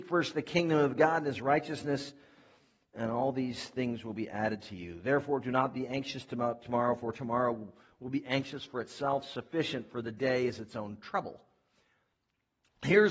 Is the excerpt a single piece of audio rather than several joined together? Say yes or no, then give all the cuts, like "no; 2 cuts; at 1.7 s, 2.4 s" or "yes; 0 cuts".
yes; 0 cuts